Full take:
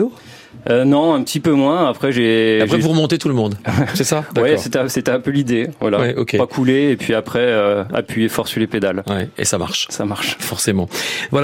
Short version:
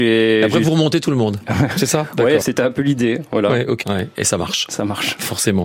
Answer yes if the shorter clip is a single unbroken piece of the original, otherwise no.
no